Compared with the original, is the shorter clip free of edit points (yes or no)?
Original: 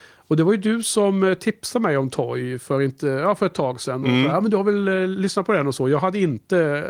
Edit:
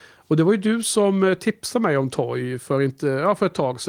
yes